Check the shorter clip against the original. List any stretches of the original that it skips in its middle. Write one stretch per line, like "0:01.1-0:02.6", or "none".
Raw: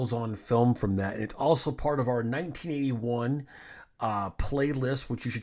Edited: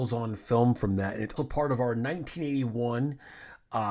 0:01.4-0:01.6